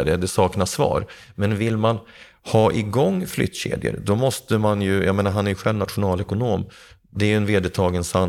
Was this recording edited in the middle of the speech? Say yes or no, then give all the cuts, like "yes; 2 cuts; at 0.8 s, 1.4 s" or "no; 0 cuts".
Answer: no; 0 cuts